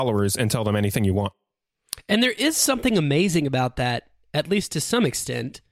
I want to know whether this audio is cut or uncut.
uncut